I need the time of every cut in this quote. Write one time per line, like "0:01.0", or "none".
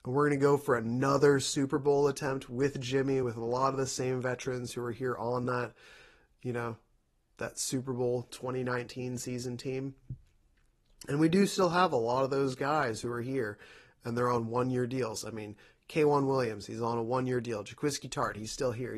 none

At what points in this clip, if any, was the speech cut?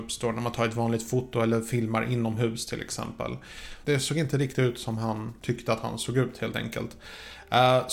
0:03.8
0:05.4

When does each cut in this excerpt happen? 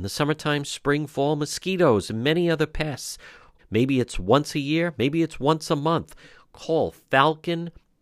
0:03.6

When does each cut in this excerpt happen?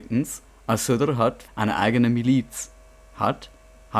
0:01.5

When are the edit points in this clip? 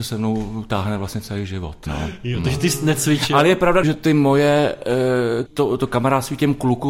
0:01.9
0:03.8
0:05.5

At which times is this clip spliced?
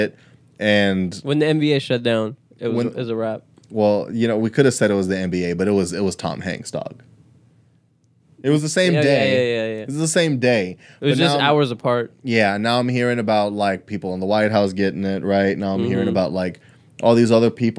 none

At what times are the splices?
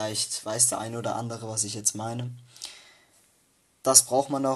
none

